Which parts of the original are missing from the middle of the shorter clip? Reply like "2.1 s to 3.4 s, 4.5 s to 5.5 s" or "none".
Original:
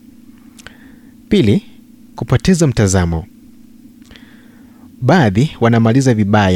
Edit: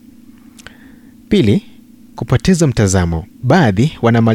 3.3 s to 4.9 s